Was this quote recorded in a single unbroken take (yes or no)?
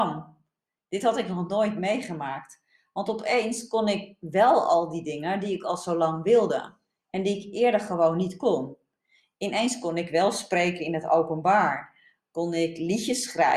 yes